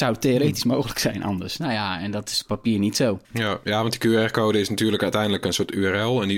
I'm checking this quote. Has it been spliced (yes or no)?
yes